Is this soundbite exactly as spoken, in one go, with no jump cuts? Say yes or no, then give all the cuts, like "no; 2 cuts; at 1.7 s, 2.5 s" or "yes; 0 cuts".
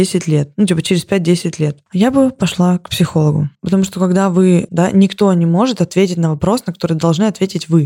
no; 2 cuts; at 3.5 s, 4.7 s